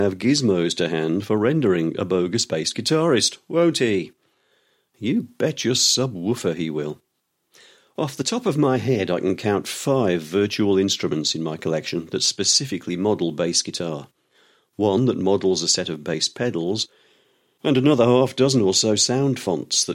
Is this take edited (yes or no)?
no